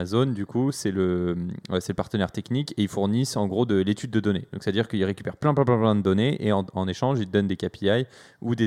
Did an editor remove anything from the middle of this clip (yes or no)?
no